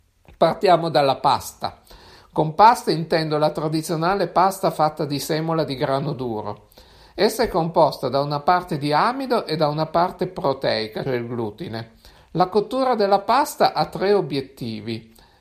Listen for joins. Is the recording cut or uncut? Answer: cut